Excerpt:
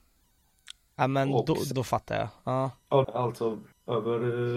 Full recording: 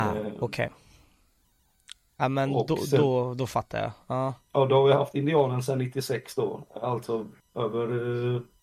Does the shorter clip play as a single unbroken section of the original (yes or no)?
no